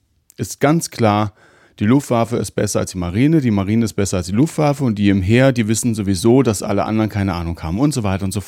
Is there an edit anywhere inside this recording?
no; 0 cuts

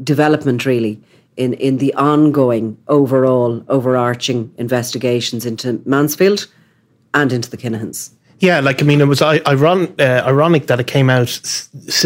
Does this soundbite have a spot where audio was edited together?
no; 0 cuts

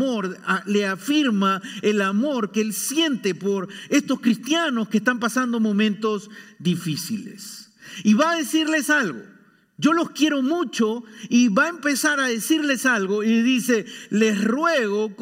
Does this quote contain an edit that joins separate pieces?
no; 0 cuts

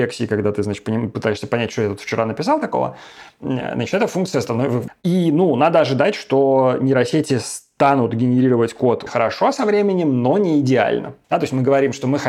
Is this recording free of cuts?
no; 3 cuts; at 4.9 s, 9.1 s, 11.2 s

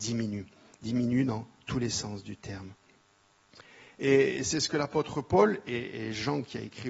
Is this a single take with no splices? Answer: yes; 0 cuts

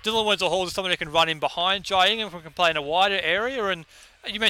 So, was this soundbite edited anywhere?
no; 0 cuts

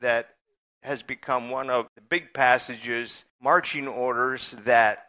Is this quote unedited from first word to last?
no; 2 cuts; at 1.9 s, 3.3 s

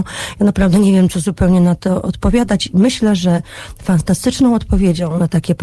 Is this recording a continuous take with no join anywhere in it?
yes; 0 cuts

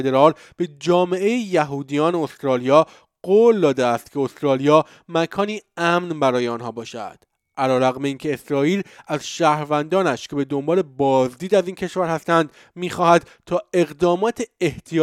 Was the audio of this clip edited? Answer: no; 0 cuts

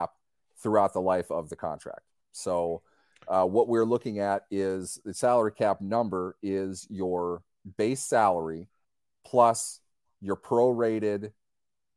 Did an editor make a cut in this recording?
no; 0 cuts

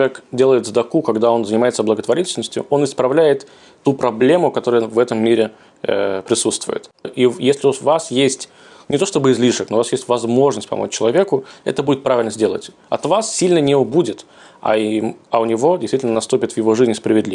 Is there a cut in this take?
yes; 1 cut; at 7.0 s

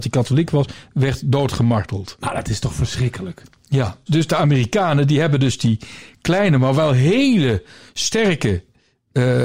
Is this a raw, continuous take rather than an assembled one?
no; 1 cut; at 4.1 s

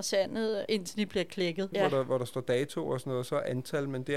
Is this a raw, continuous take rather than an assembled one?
no; 1 cut; at 1.7 s

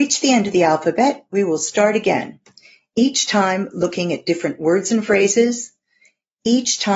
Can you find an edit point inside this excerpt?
no; 0 cuts

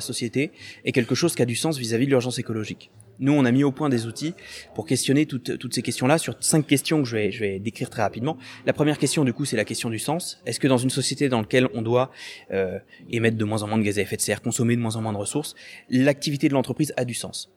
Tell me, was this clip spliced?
no; 0 cuts

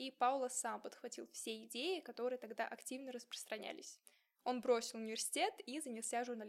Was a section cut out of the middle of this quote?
no; 0 cuts

